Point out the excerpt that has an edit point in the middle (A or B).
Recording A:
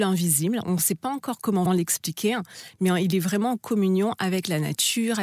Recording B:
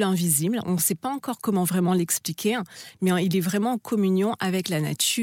A